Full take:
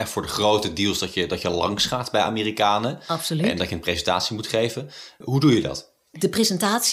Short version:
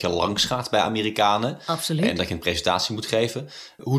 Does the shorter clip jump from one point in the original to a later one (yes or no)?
no